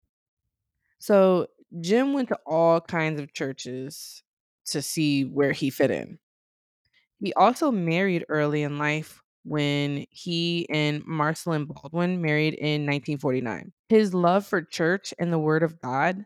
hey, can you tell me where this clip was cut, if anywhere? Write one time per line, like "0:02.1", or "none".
0:13.8